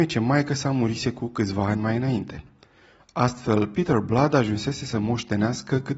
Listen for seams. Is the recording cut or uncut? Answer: uncut